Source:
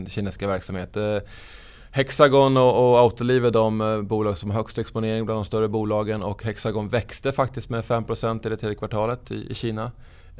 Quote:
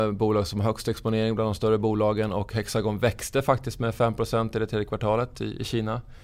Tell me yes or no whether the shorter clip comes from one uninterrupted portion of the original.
yes